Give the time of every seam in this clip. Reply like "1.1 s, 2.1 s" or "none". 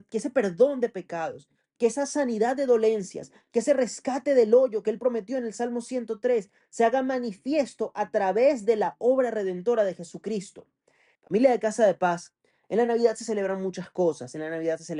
11.1 s